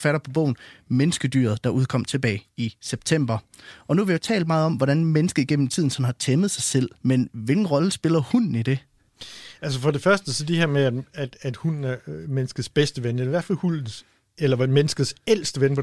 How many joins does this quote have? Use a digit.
1